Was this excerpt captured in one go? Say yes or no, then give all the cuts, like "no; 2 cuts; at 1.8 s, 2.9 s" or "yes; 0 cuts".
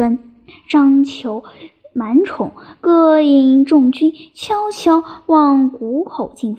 yes; 0 cuts